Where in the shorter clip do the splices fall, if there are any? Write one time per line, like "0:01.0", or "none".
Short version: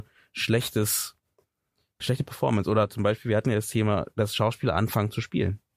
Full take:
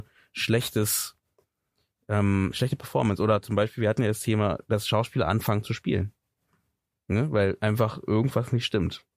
0:02.0

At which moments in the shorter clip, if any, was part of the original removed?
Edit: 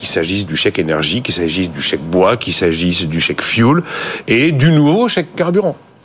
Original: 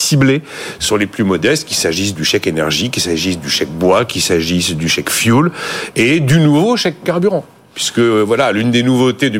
none

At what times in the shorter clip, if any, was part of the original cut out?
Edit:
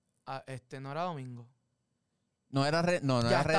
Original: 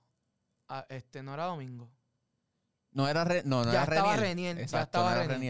none

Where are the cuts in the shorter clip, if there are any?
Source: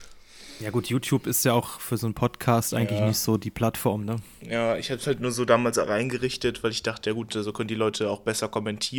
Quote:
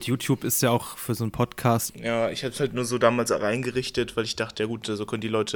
0:01.9

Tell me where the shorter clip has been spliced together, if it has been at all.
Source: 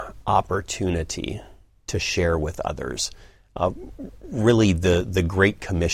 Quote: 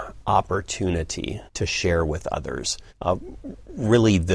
0:01.5
0:02.9

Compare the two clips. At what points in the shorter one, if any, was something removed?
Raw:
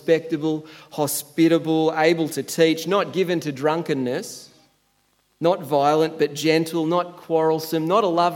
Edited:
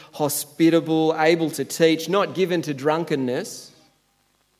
none

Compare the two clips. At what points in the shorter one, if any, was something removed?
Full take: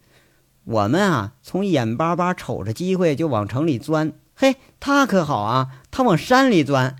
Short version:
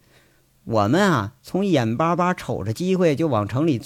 none

